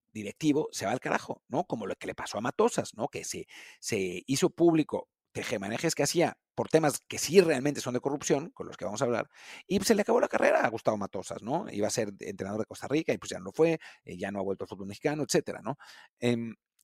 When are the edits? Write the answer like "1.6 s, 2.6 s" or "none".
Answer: none